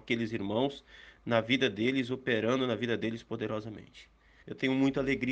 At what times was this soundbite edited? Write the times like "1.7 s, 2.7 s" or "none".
4.4 s